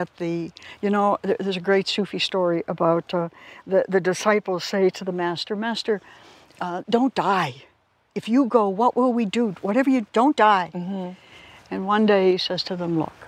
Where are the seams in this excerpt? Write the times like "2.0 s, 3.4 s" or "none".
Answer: none

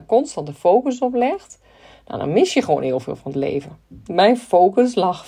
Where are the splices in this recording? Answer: 4.1 s

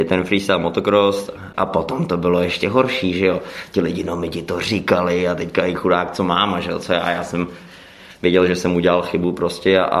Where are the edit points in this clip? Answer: 1.5 s

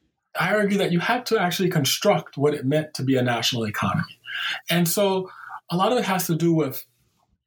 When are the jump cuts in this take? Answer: none

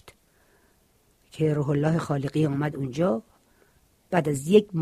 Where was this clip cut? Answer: none

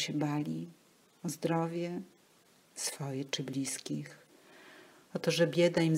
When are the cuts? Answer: none

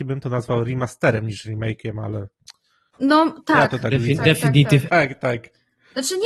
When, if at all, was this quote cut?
2.9 s, 4.9 s

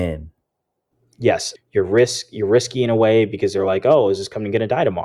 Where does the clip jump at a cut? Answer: 1.6 s

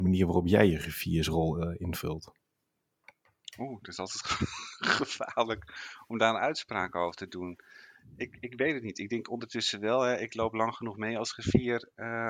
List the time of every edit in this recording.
none

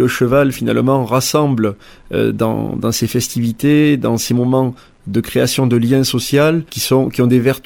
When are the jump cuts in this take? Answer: 6.7 s

